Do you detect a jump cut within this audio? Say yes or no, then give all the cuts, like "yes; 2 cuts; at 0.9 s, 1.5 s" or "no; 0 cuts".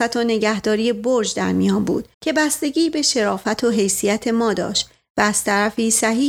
yes; 1 cut; at 2.1 s